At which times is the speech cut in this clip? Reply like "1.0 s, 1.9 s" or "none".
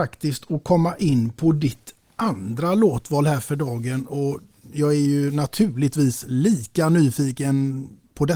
none